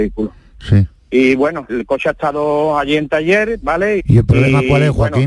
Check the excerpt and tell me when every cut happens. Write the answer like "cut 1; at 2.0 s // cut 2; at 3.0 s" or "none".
cut 1; at 1.7 s // cut 2; at 4.0 s